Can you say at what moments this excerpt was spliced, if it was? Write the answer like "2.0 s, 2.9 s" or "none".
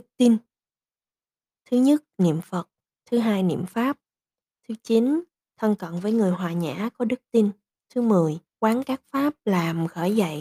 4.6 s, 8.5 s